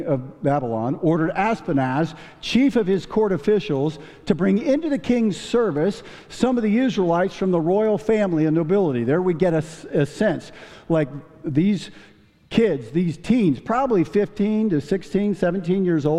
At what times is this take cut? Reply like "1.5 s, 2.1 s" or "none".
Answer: none